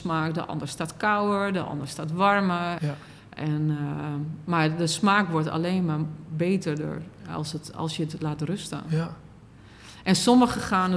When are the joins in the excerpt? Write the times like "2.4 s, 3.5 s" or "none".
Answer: 2.8 s

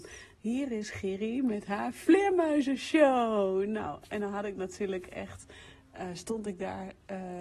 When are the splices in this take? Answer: none

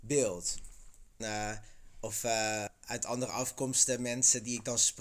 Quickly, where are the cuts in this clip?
1.2 s

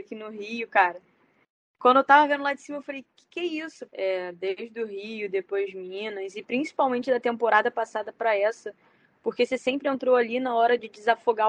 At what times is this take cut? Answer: 3.9 s

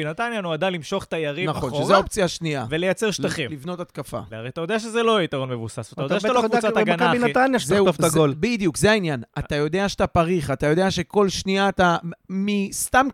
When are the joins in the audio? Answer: 4.3 s

